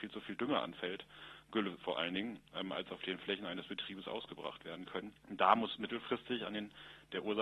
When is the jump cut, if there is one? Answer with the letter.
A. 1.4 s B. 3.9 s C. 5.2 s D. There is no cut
C